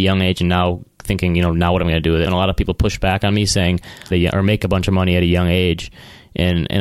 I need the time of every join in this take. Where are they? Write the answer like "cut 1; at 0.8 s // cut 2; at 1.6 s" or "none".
cut 1; at 2.3 s // cut 2; at 4.1 s